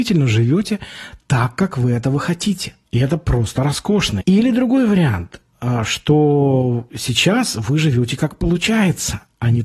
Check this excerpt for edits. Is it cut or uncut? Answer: cut